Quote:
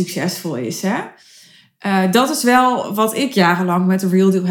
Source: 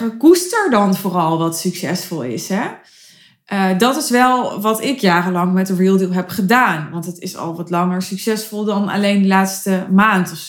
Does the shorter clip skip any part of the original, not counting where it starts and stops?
no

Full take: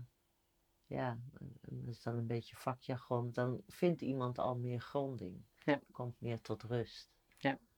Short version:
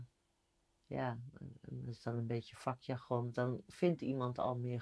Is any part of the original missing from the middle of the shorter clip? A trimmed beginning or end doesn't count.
no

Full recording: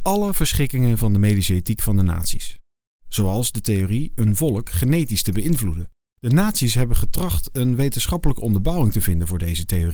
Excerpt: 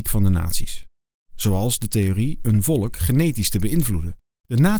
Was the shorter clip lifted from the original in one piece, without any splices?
yes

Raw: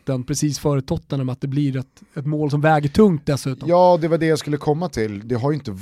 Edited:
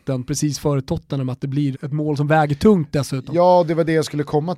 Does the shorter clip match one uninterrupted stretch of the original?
no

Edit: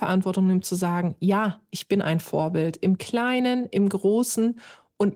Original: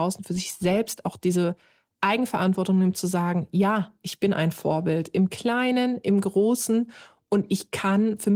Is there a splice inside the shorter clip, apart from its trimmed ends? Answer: no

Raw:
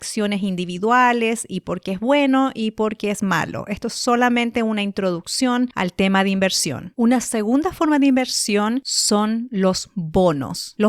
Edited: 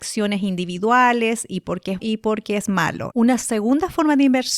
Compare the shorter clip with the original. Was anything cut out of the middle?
yes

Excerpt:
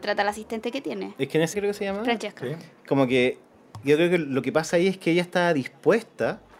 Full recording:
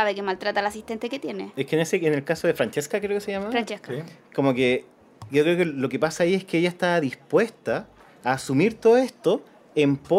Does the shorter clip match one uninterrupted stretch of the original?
no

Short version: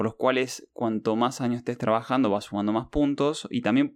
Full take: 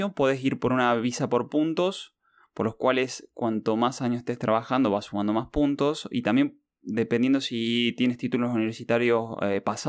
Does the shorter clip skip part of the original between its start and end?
no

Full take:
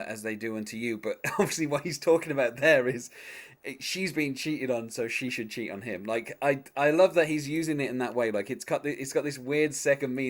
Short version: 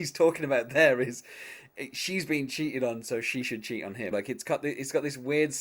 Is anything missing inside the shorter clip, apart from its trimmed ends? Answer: yes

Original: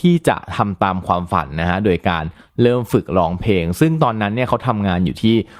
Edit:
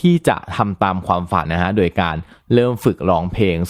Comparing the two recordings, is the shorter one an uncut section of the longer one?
no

